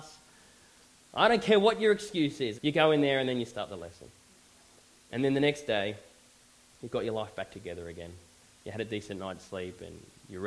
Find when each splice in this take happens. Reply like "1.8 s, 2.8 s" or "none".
2.5 s